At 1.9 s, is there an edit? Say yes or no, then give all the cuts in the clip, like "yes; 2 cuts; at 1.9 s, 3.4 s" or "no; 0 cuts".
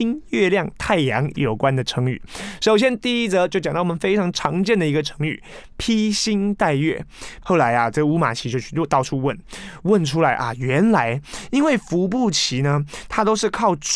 no; 1 cut; at 7.4 s